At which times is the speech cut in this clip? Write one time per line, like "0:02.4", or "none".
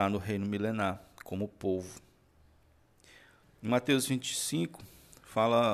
0:03.4